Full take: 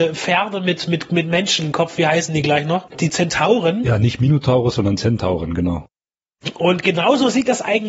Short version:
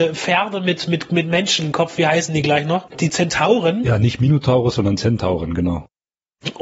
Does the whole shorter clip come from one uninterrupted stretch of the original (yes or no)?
yes